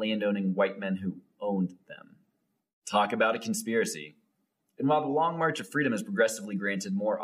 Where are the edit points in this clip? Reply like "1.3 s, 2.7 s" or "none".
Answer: none